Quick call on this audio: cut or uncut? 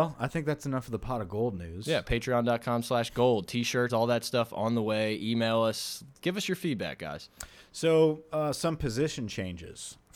cut